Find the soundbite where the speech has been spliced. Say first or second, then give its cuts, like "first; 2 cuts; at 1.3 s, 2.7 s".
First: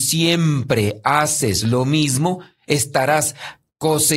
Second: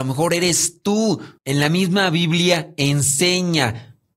second; 1 cut; at 1.4 s